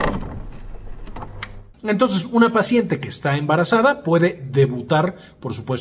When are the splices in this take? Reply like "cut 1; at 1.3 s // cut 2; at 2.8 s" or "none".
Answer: cut 1; at 1.7 s

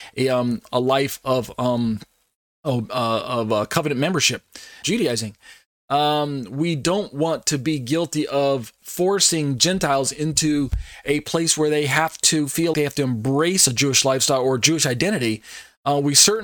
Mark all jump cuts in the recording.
cut 1; at 4.8 s // cut 2; at 12.7 s

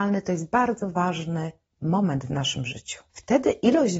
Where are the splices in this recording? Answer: cut 1; at 3.1 s

